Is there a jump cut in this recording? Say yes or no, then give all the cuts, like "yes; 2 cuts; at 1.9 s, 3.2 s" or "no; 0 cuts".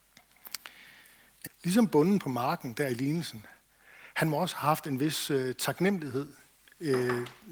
yes; 1 cut; at 1.5 s